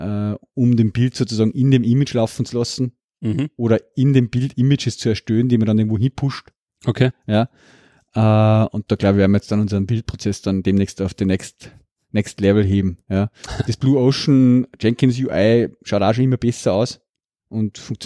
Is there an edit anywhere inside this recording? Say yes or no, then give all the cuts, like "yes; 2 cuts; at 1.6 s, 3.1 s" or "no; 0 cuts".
no; 0 cuts